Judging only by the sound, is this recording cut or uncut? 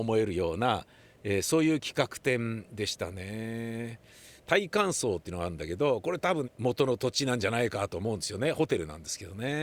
cut